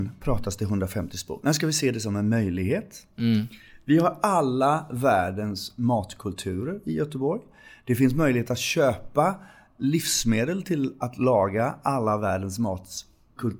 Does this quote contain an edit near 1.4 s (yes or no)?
no